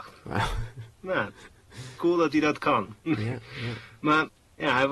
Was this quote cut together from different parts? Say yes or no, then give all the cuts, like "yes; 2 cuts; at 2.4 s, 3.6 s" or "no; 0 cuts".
no; 0 cuts